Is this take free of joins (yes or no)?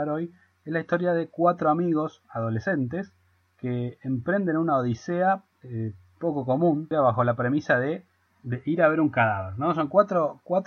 no